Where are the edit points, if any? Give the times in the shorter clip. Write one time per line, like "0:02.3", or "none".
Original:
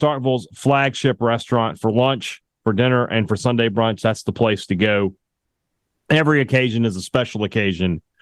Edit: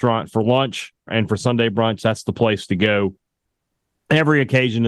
0:01.1